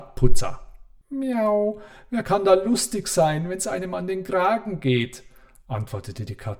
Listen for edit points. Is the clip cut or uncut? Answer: cut